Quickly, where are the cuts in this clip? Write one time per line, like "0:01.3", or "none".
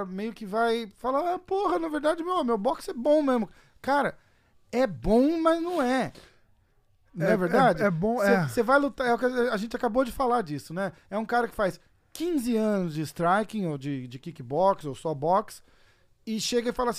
none